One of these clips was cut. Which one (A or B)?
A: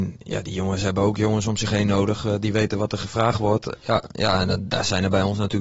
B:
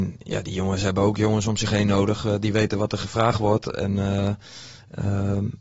A